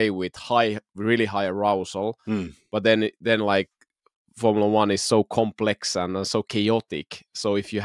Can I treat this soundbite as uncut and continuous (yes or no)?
yes